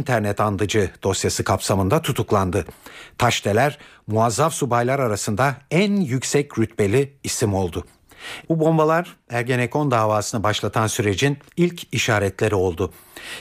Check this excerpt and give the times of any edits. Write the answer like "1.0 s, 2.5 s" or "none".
8.4 s

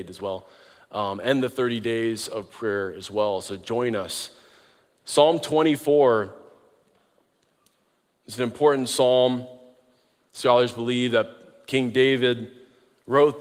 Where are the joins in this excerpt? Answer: none

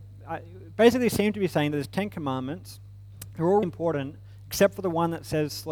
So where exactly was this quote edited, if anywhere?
3.6 s

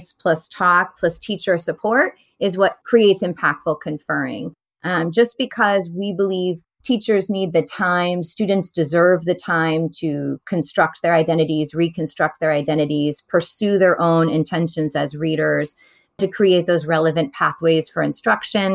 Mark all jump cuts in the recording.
none

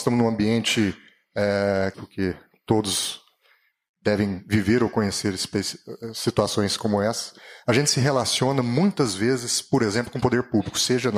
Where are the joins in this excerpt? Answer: 1.9 s

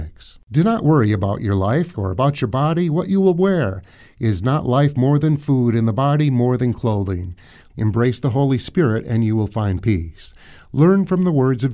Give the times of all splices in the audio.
1.9 s, 7.7 s

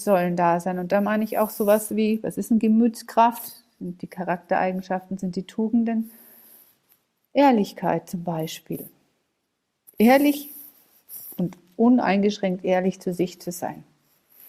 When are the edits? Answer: none

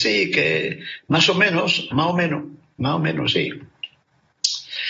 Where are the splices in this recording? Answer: 1.9 s

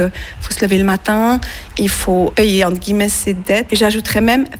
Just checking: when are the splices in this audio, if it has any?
3.7 s

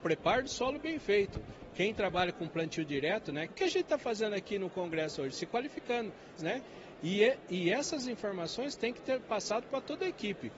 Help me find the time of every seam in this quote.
3.5 s, 6.4 s

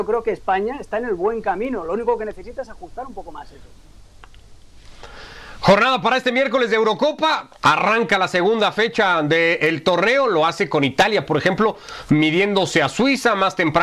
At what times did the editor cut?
none

